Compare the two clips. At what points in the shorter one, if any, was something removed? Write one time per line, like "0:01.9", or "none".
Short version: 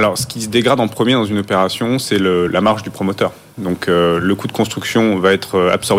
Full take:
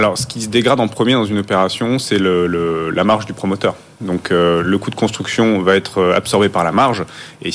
0:02.5